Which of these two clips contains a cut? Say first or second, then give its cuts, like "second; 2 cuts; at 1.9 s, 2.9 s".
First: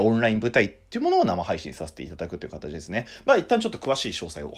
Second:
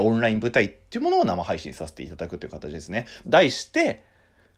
second; 1 cut; at 3.2 s